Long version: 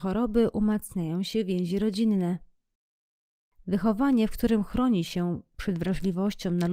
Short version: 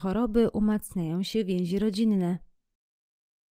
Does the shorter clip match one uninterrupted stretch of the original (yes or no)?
yes